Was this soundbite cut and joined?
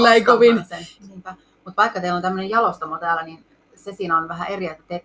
yes; 1 cut; at 1.0 s

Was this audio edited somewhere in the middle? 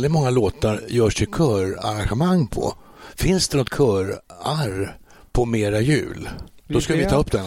no; 0 cuts

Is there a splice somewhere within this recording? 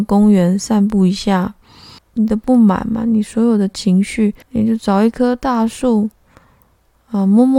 yes; 2 cuts; at 2.0 s, 4.4 s

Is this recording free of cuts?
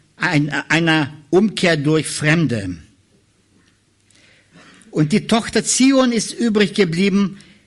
yes; 0 cuts

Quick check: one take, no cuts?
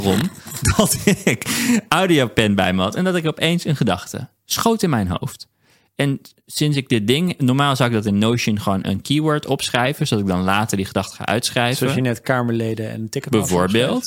yes; 0 cuts

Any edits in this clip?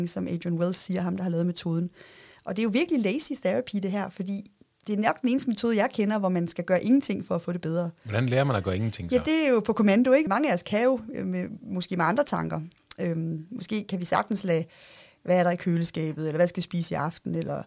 yes; 1 cut; at 10.3 s

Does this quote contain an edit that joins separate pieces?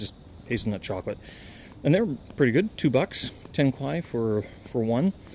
no; 0 cuts

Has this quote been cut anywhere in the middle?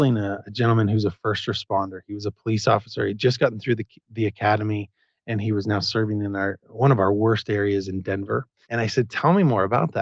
yes; 1 cut; at 8.6 s

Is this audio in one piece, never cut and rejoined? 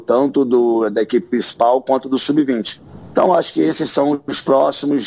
yes; 0 cuts

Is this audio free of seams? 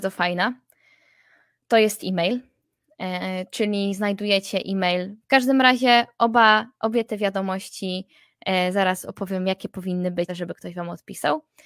no; 2 cuts; at 5.2 s, 10.3 s

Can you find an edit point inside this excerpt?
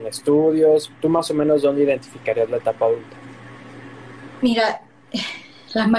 no; 0 cuts

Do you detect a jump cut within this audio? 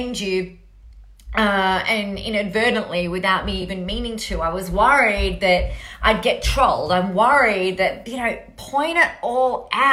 no; 0 cuts

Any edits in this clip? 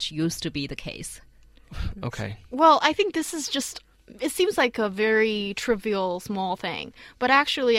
no; 0 cuts

